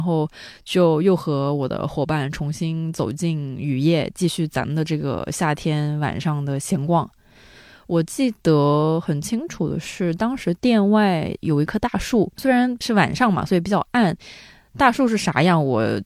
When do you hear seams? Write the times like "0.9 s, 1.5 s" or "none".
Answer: none